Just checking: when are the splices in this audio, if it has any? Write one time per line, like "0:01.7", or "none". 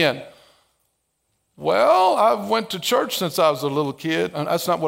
none